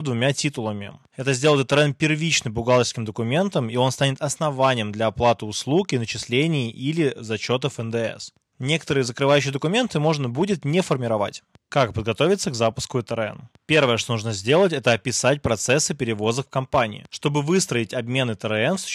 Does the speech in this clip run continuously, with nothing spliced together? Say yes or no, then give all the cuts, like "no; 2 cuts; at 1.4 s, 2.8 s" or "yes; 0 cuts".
yes; 0 cuts